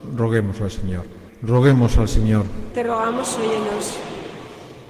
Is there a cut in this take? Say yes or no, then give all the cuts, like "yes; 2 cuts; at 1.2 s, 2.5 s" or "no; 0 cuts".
yes; 2 cuts; at 1.3 s, 2.7 s